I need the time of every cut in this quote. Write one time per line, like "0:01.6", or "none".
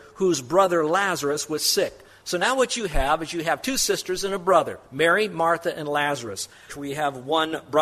0:06.7